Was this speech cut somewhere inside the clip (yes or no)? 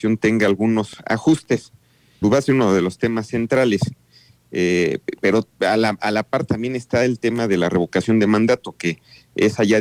yes